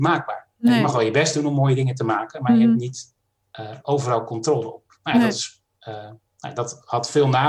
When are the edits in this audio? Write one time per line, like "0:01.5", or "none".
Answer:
none